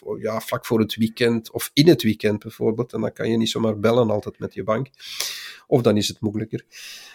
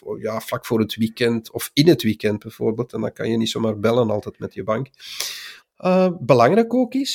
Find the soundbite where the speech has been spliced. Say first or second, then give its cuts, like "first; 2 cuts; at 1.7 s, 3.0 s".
second; 1 cut; at 5.6 s